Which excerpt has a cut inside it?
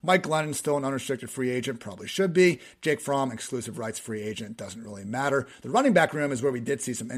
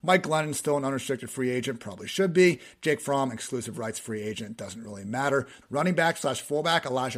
second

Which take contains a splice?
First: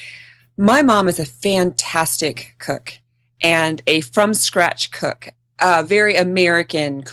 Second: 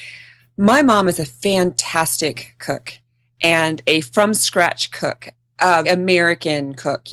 second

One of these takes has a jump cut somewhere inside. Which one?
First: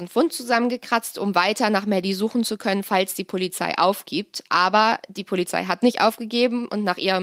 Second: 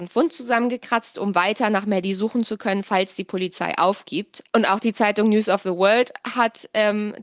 second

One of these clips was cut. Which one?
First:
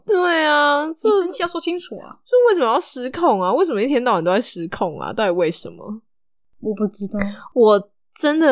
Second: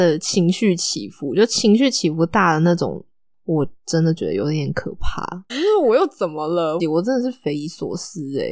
second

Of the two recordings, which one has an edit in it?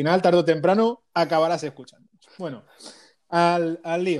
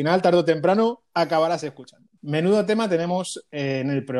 second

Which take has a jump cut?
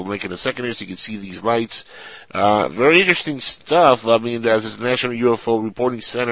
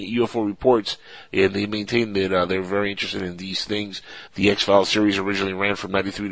second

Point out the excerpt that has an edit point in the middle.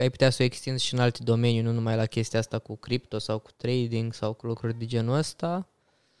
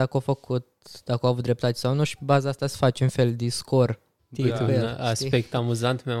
second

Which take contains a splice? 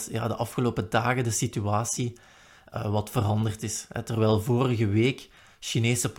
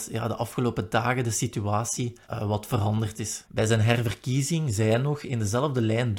second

